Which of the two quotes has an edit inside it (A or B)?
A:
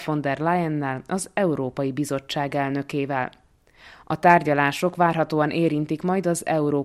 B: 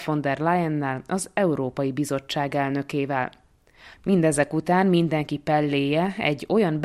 B